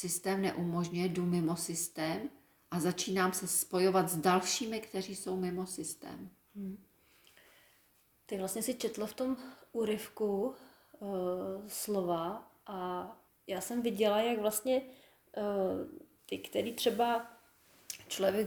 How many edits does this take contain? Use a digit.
2